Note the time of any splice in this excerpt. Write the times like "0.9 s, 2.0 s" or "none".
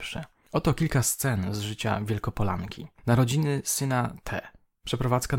none